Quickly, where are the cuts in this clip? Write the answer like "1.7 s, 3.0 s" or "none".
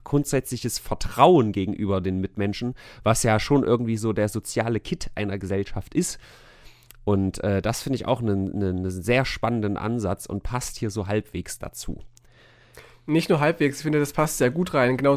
none